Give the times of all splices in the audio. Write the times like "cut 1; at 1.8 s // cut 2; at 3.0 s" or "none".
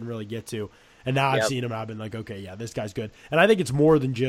none